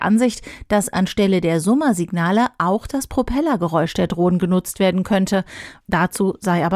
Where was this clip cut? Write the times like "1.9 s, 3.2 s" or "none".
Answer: 5.8 s